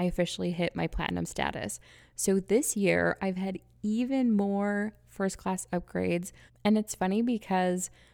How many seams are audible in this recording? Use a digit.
1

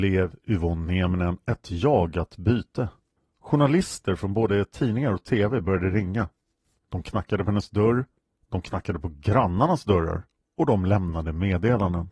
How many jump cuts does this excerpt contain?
0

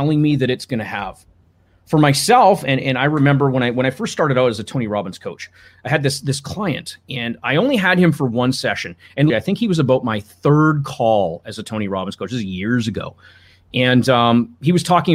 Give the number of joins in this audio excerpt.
1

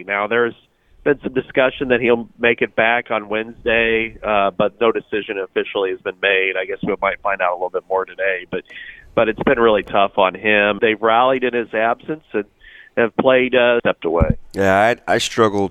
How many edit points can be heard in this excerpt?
2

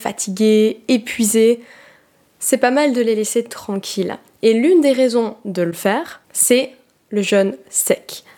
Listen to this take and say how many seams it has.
1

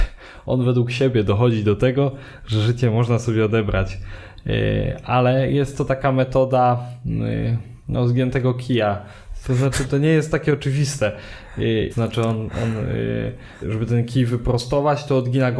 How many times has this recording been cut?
3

